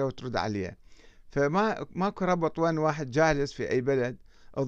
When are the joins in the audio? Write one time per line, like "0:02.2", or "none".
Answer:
none